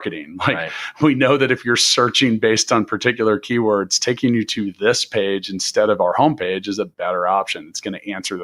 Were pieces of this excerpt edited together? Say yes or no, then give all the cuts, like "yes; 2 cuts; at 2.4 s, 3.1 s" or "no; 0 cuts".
no; 0 cuts